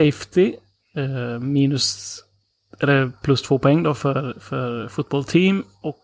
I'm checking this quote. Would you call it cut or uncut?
uncut